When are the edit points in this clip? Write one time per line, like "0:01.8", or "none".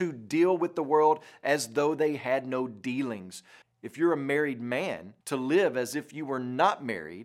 0:03.6
0:05.2